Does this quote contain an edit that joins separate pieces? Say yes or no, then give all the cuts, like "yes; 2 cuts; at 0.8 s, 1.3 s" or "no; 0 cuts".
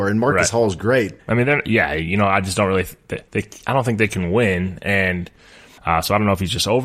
yes; 3 cuts; at 1.2 s, 3.3 s, 5.8 s